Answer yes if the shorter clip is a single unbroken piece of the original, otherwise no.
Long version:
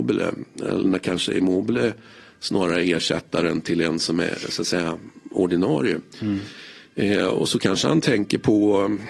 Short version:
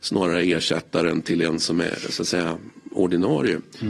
yes